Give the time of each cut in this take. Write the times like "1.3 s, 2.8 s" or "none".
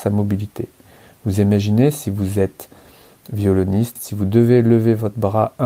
4.0 s